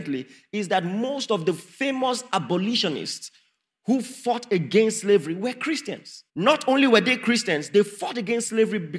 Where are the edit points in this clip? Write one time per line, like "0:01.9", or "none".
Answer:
0:06.3